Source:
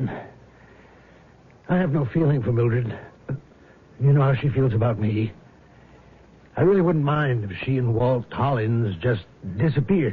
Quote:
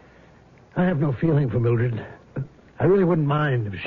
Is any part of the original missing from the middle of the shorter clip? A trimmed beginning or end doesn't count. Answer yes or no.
yes